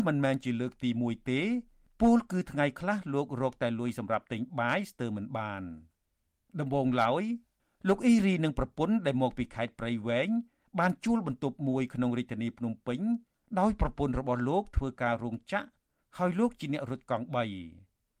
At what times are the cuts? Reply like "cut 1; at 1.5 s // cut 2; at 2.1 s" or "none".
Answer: none